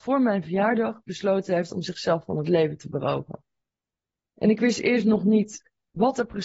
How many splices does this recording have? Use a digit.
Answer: 1